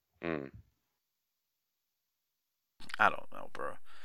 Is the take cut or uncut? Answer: uncut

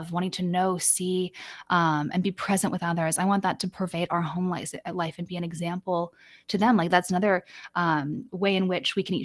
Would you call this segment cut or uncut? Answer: uncut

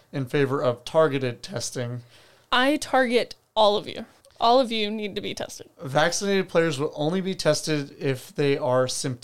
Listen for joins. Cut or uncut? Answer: uncut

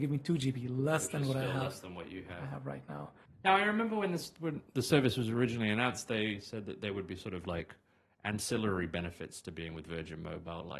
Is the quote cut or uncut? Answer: cut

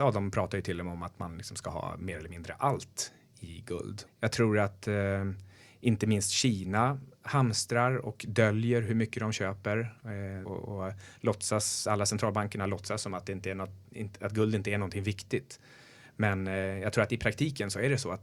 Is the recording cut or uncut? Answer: cut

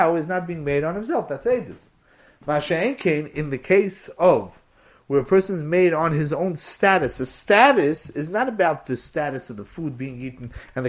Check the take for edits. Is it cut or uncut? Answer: uncut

